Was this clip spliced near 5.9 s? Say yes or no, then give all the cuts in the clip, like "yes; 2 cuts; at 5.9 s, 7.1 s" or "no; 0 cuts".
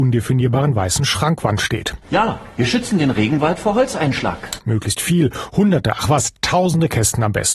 no; 1 cut; at 4.6 s